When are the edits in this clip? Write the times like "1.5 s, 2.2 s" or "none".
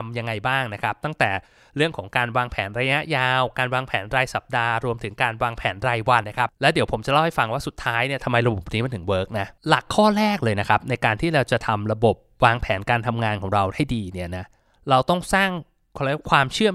6.2 s, 9.6 s